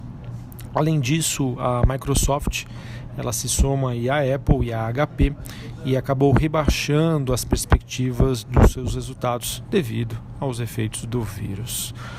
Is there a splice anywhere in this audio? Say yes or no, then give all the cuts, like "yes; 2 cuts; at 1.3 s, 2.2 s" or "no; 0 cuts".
no; 0 cuts